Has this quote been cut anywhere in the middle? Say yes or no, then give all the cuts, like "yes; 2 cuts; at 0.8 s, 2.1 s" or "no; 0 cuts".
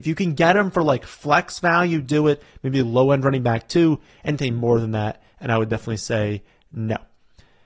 no; 0 cuts